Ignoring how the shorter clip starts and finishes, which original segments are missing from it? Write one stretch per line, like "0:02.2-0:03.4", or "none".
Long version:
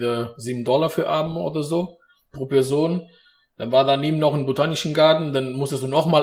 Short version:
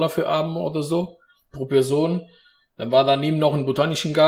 none